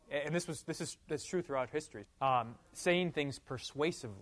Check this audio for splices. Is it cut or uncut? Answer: cut